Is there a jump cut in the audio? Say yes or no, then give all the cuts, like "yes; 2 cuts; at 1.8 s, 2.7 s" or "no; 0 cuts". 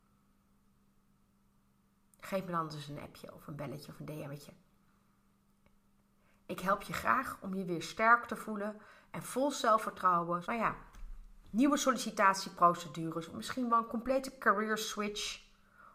yes; 1 cut; at 10.4 s